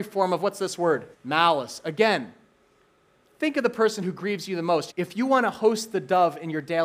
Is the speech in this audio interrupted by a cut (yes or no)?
yes